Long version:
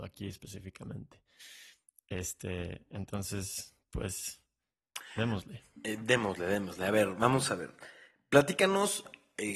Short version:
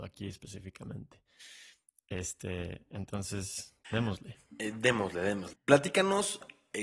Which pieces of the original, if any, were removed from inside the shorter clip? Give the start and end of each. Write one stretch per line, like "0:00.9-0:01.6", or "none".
0:03.8-0:05.1
0:06.8-0:08.2